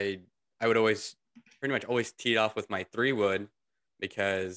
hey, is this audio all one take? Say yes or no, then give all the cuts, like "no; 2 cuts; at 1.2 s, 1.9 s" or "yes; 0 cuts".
yes; 0 cuts